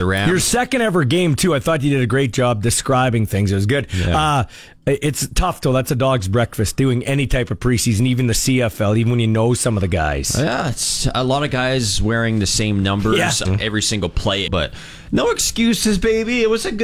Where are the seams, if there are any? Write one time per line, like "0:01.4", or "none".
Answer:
0:13.4
0:14.5

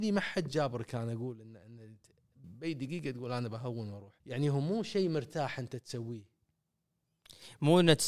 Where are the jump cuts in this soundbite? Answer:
0:02.4
0:04.2

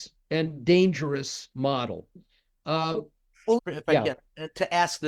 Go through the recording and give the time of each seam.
0:03.6

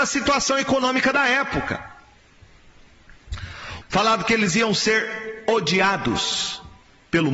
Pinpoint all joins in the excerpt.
0:03.8

